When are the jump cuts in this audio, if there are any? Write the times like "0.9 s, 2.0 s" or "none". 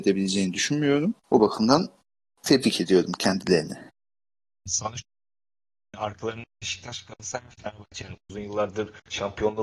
1.2 s